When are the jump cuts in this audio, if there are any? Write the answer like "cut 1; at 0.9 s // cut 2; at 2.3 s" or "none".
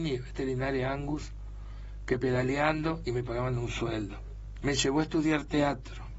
cut 1; at 4.6 s